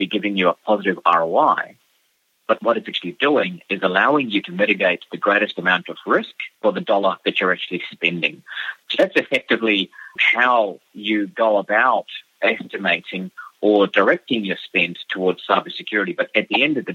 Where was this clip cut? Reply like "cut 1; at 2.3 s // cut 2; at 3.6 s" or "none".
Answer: cut 1; at 6.5 s

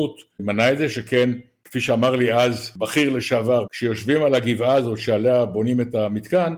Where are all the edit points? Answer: cut 1; at 3.7 s

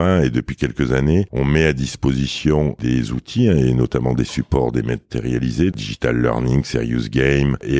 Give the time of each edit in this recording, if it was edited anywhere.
cut 1; at 5.7 s

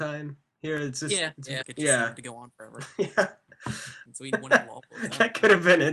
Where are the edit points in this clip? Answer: cut 1; at 1.6 s // cut 2; at 4.1 s

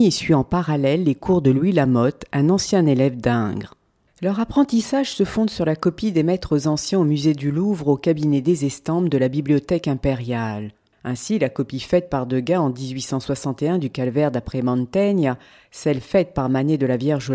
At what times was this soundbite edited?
cut 1; at 10.9 s

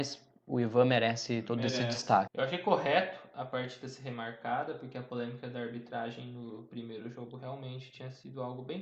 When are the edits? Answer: cut 1; at 2.3 s

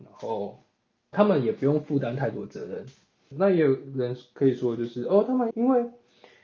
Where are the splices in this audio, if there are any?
cut 1; at 1.1 s // cut 2; at 3.3 s // cut 3; at 5.5 s

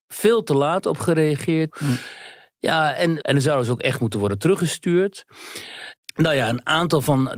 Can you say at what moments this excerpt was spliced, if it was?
cut 1; at 1.7 s // cut 2; at 3.2 s

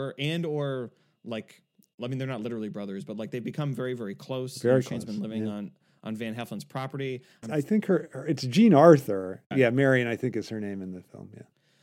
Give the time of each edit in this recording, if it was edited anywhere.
cut 1; at 7.4 s // cut 2; at 9.5 s

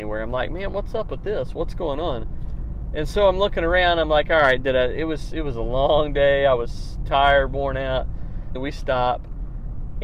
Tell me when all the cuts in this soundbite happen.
cut 1; at 8.5 s

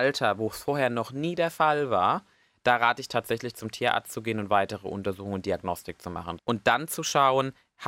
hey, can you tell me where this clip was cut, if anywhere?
cut 1; at 6.4 s

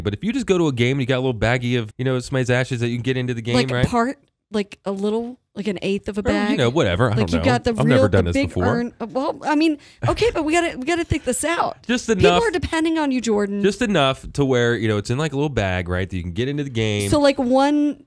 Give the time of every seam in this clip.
cut 1; at 1.9 s

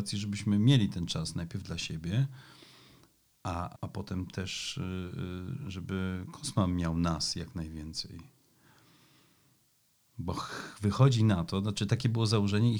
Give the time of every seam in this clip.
cut 1; at 3.8 s

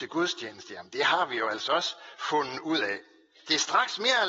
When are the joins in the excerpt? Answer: none

